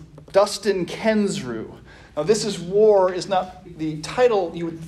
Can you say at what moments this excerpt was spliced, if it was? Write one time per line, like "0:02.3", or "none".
0:03.6

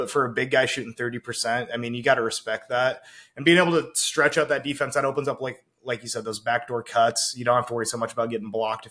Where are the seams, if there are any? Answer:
none

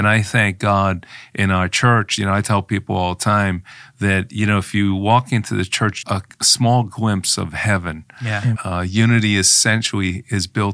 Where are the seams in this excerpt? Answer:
0:06.0
0:08.5

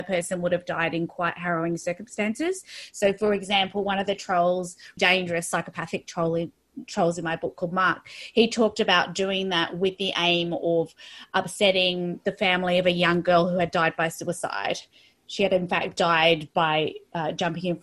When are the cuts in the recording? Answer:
0:05.0

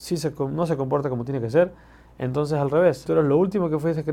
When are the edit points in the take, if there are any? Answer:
0:03.1

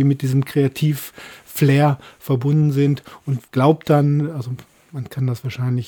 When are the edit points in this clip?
0:03.5

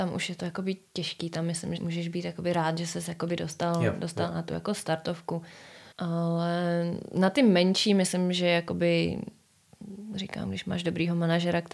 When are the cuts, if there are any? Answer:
0:01.8
0:05.9

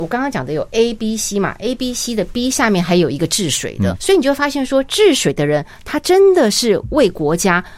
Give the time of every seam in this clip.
0:03.9

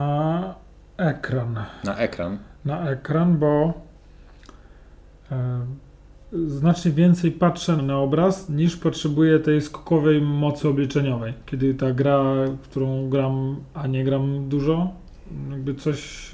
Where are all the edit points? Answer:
0:07.8

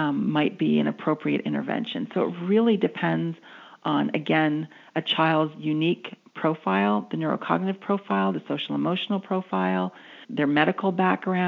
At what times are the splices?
0:10.2

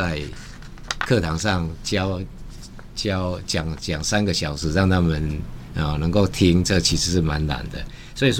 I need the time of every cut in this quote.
none

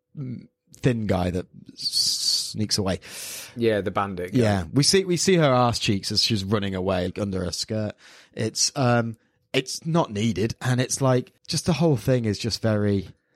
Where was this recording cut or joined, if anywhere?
0:07.1
0:11.4

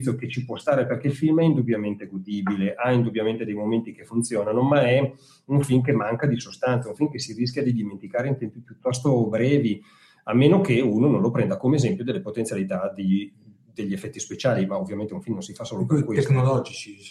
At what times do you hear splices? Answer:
none

